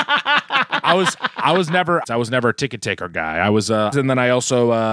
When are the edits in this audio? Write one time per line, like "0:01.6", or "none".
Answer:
0:02.0
0:03.9